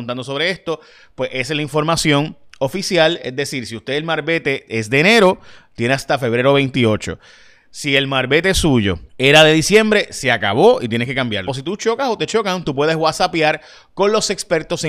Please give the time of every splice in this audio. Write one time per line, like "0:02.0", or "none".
0:09.1
0:11.5